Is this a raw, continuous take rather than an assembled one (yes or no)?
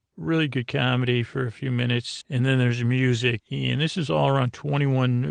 no